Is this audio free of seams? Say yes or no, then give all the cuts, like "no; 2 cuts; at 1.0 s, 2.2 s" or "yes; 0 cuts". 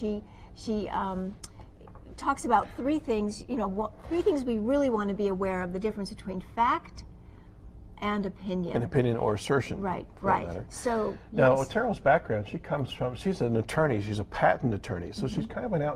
no; 1 cut; at 7.9 s